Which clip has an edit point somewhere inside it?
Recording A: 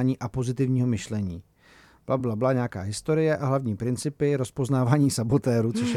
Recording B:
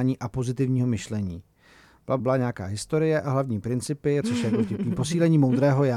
B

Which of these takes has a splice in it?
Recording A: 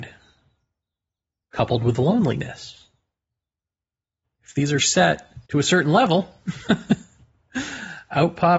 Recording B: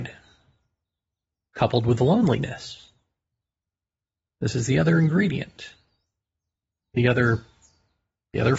A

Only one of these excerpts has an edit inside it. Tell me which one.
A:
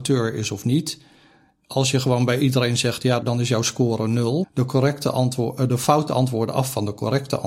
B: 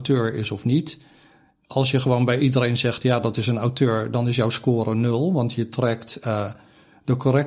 A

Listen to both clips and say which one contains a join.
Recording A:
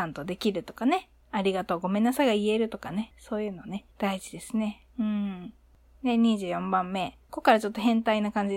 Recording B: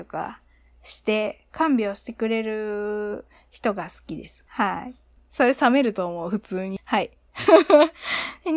B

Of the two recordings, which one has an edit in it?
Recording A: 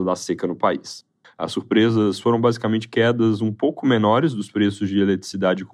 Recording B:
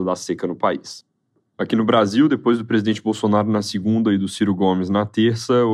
A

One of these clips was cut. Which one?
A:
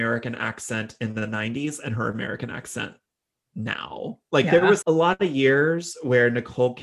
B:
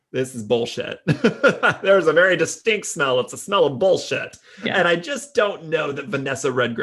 A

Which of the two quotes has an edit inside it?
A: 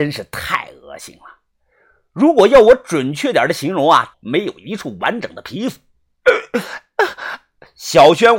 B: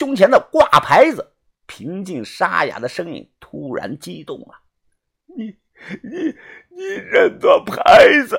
A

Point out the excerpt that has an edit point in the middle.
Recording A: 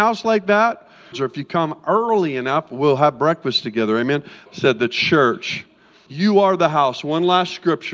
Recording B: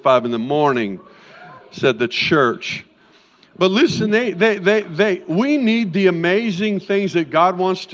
A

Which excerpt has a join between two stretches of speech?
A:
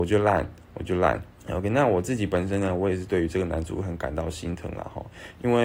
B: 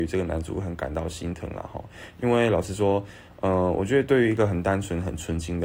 A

